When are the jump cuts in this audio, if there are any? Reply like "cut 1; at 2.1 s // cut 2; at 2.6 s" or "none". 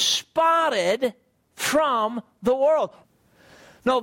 cut 1; at 3.0 s